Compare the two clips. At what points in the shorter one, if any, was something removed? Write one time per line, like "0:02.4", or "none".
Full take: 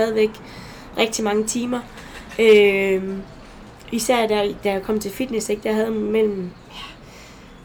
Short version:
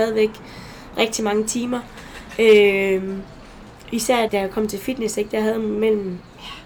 0:04.3

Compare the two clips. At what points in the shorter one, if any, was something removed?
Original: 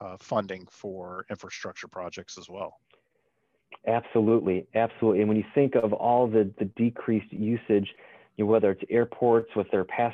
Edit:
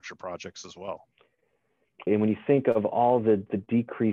0:02.1

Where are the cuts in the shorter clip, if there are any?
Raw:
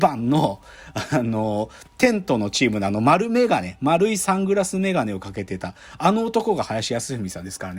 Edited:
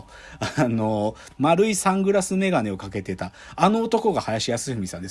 0:01.4

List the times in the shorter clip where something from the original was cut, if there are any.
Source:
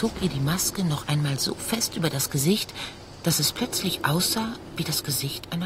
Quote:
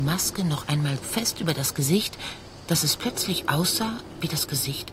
0:01.0

